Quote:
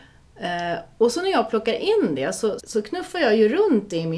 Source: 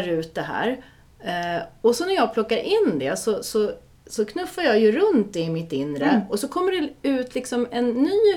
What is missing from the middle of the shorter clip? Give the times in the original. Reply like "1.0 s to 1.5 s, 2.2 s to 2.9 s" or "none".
3.4 s to 4.0 s